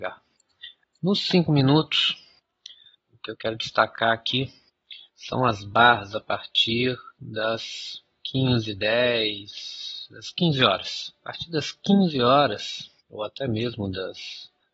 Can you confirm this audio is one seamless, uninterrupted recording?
no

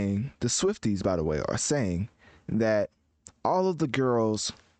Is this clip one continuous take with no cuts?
yes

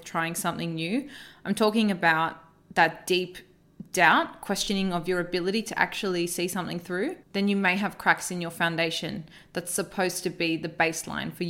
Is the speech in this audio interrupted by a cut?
yes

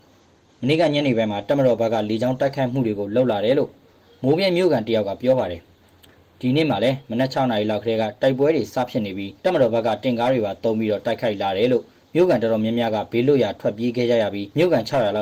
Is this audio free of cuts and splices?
no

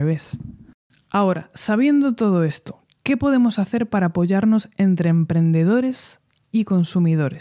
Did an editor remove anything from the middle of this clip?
no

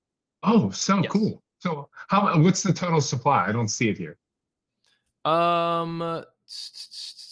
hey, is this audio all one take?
yes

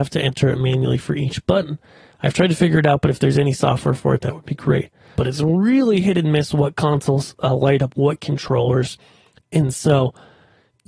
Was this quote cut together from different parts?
yes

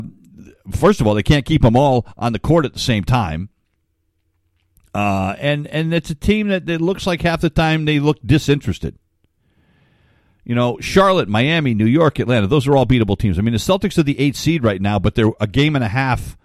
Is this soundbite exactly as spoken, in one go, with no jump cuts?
yes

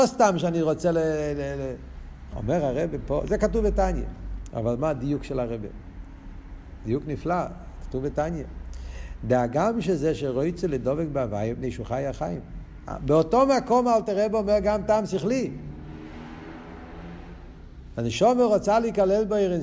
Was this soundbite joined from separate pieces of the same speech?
yes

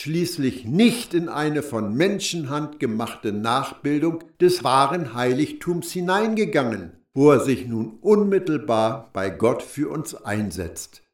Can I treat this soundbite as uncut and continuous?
no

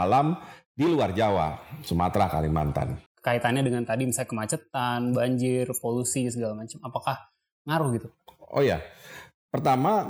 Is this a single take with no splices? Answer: no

